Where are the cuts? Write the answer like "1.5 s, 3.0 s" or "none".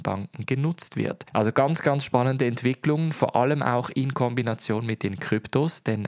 1.3 s